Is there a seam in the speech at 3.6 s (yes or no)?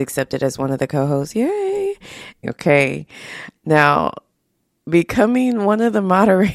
yes